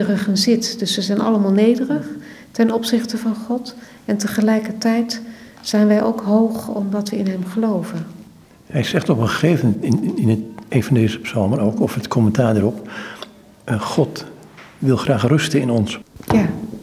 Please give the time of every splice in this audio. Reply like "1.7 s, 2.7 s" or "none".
none